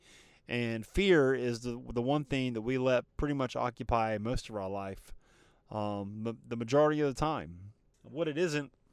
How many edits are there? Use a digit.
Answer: 1